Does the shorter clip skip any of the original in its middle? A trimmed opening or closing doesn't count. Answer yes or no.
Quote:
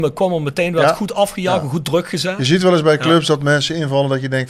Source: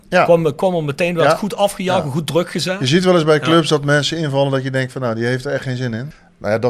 no